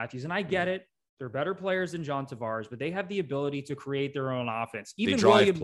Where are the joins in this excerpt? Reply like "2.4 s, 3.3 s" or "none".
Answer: none